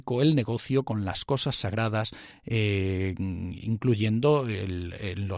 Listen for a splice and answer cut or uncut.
uncut